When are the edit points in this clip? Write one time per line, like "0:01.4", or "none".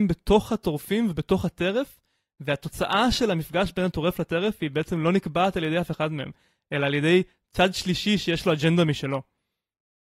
none